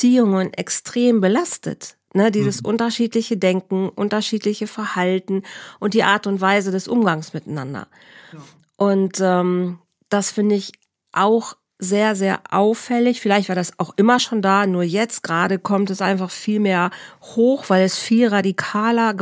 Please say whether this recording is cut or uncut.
uncut